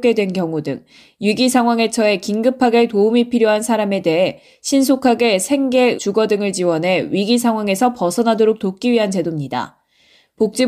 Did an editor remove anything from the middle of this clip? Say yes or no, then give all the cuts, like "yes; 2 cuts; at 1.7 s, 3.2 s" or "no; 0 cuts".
yes; 1 cut; at 6.0 s